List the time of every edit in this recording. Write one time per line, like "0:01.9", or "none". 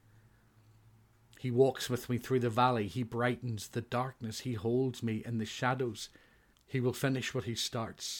0:06.5